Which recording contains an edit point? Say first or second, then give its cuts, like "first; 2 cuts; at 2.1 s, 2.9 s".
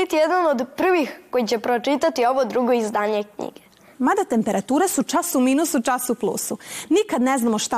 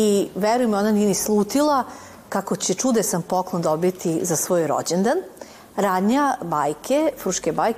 first; 1 cut; at 3.9 s